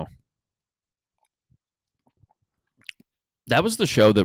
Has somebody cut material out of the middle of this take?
no; 0 cuts

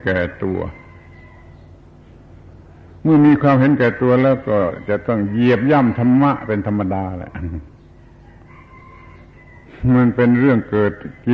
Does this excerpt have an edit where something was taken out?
no; 0 cuts

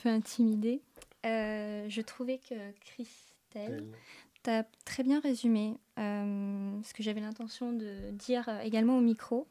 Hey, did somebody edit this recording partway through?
no; 0 cuts

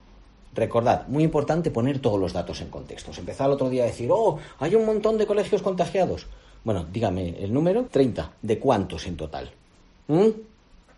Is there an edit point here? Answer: yes; 1 cut; at 7.9 s

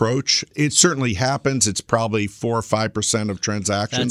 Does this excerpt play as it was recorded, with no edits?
yes; 0 cuts

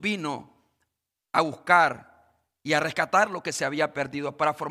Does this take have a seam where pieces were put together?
no; 0 cuts

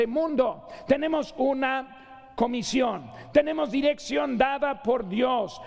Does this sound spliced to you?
yes; 1 cut; at 3.3 s

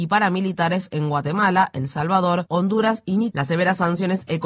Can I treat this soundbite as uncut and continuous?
no; 1 cut; at 3.3 s

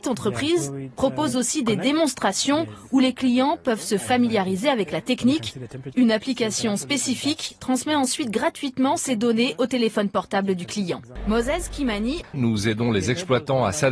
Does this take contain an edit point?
yes; 2 cuts; at 5.9 s, 12.3 s

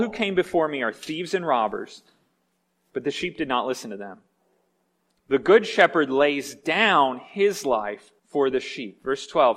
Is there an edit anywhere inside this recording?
yes; 2 cuts; at 5.2 s, 8.2 s

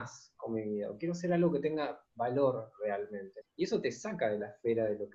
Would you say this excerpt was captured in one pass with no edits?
no; 1 cut; at 3.4 s

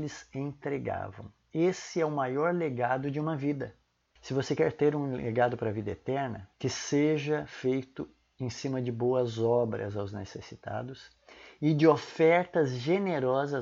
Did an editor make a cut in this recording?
yes; 2 cuts; at 4.2 s, 6.5 s

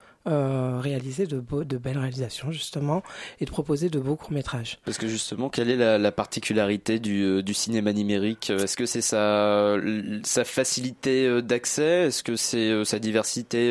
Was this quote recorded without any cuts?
yes; 0 cuts

